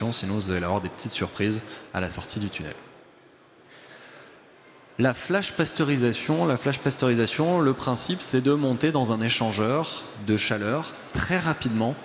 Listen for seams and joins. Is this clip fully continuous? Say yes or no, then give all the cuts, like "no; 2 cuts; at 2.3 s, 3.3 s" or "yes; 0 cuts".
yes; 0 cuts